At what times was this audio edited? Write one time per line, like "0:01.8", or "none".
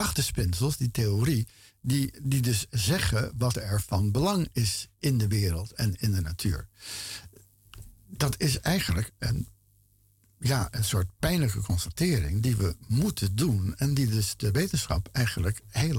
none